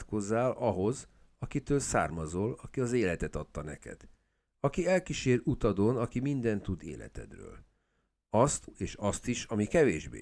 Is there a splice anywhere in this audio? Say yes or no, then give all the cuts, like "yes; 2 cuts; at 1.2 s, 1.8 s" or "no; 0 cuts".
yes; 1 cut; at 8.7 s